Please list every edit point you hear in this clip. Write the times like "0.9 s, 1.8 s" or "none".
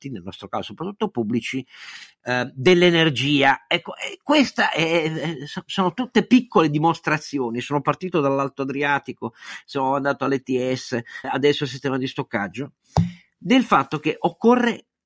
11.2 s